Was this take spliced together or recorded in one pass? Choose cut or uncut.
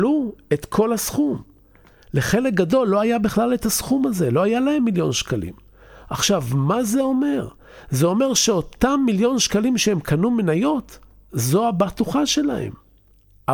uncut